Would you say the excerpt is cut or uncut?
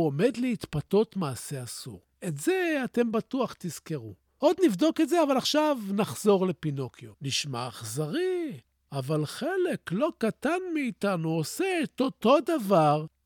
cut